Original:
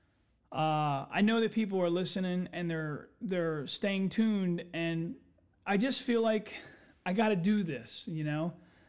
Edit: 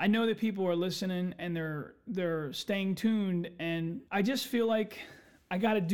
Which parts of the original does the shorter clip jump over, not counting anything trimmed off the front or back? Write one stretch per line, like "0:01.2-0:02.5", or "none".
0:05.2-0:05.6